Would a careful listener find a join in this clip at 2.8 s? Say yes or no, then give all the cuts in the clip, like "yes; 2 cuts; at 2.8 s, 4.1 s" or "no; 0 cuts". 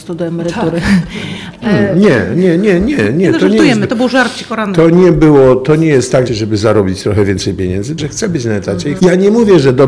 no; 3 cuts; at 6.3 s, 8.0 s, 9.0 s